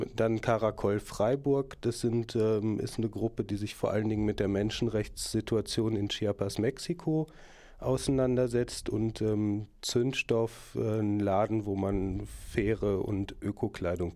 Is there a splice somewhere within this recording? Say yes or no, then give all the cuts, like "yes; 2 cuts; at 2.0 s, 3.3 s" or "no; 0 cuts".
no; 0 cuts